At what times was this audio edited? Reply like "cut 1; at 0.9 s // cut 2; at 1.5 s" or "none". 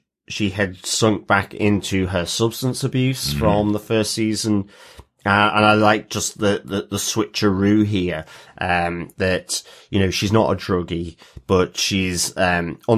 none